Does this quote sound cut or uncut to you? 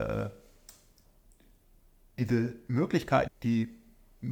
cut